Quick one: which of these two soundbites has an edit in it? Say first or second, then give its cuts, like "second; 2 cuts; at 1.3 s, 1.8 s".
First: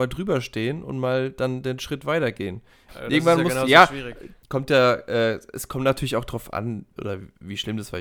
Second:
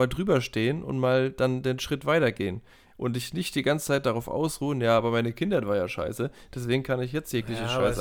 first; 3 cuts; at 2.9 s, 4.4 s, 6.9 s